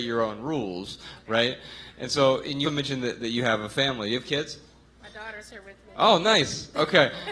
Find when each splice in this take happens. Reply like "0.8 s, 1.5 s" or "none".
2.6 s